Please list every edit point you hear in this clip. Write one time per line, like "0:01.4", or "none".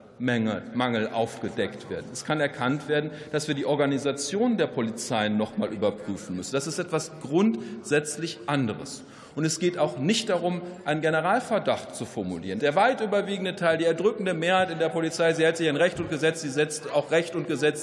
0:12.6